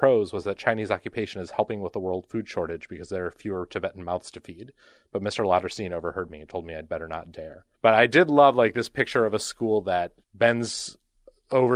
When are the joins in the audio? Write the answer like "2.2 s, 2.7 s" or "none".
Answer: 7.7 s, 10.2 s